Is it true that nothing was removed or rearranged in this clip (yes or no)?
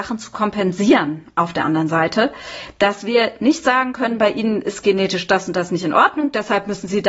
yes